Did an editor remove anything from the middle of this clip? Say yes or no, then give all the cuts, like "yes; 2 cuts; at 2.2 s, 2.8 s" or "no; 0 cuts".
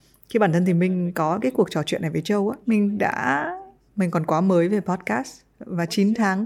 yes; 1 cut; at 2.6 s